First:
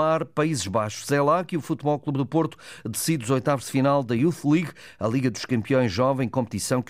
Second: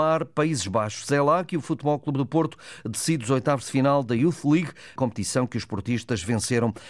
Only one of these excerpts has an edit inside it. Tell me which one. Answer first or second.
second